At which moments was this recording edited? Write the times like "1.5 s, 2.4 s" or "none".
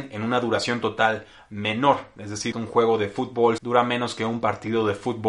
2.5 s, 3.6 s